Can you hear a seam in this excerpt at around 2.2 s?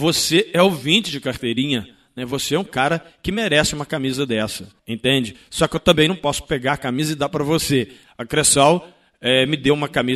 no; 2 cuts; at 4.8 s, 8.0 s

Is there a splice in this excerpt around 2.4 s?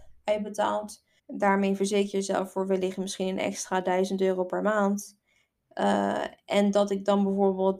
no; 2 cuts; at 1.2 s, 5.6 s

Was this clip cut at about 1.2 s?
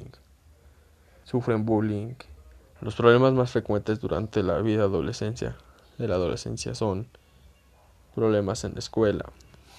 yes; 2 cuts; at 1.2 s, 2.8 s

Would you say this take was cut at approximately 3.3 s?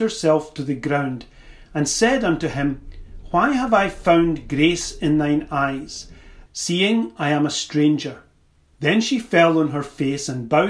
no; 2 cuts; at 6.5 s, 8.7 s

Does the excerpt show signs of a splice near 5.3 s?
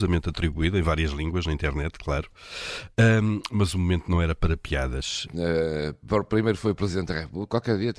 yes; 1 cut; at 5.3 s

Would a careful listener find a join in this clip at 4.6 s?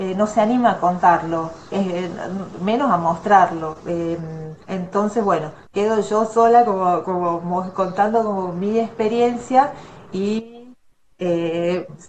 yes; 1 cut; at 4.6 s

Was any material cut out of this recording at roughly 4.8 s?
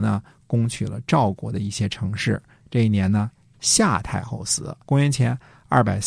yes; 1 cut; at 4.8 s

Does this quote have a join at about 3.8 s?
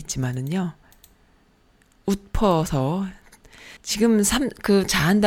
yes; 1 cut; at 3.8 s

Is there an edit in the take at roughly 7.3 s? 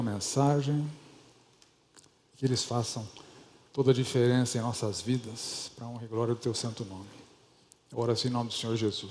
no; 1 cut; at 2.3 s

